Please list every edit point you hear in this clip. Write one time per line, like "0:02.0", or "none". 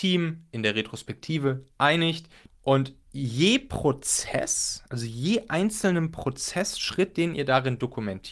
0:02.5